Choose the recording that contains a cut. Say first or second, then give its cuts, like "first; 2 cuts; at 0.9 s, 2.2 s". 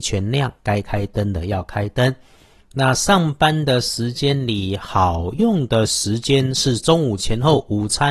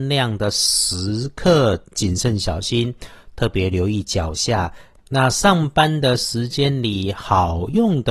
second; 1 cut; at 5.0 s